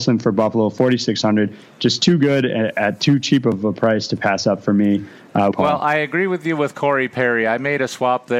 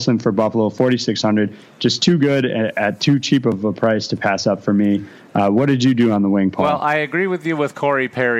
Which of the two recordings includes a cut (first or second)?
first